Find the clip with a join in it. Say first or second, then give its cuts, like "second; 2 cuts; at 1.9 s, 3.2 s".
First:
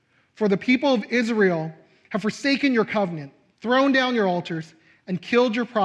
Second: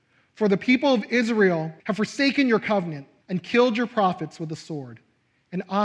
second; 2 cuts; at 1.8 s, 3.2 s